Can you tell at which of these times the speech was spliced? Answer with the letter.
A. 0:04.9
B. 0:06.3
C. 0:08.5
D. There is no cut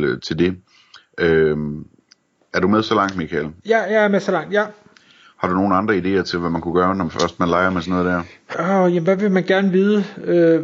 C